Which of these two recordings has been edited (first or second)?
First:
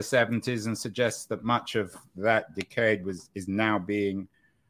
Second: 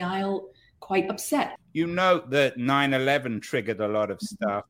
second